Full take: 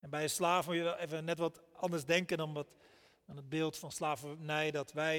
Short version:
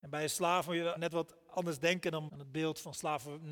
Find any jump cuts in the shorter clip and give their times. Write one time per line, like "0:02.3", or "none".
0:01.0
0:02.3